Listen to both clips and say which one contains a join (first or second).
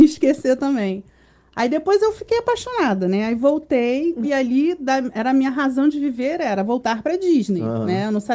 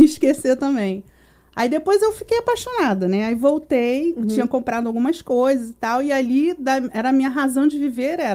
first